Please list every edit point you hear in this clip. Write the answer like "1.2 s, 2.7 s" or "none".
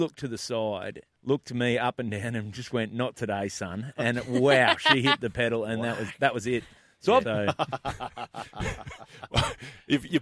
1.1 s, 7.2 s